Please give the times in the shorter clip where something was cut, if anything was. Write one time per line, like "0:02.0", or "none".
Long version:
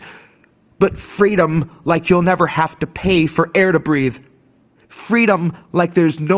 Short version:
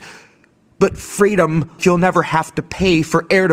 0:01.8